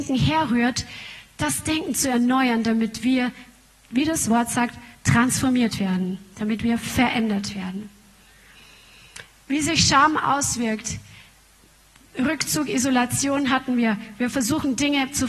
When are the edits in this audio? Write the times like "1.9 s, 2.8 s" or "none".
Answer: none